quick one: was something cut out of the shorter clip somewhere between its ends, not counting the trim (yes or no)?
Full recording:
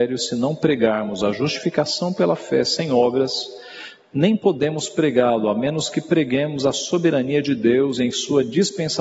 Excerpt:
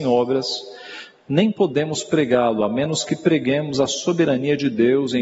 no